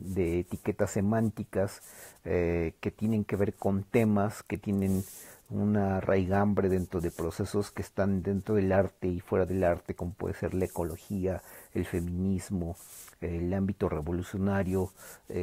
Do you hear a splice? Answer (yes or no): no